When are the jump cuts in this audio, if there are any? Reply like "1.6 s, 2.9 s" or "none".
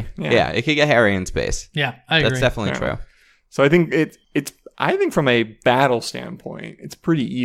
4.2 s